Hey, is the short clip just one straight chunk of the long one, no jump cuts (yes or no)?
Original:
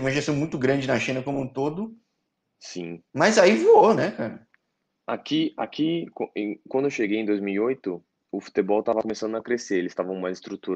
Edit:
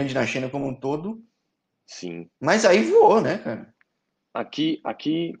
yes